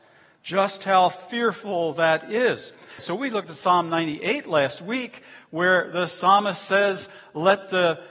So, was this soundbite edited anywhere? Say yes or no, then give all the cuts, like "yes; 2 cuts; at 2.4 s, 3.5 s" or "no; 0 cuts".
yes; 1 cut; at 3.0 s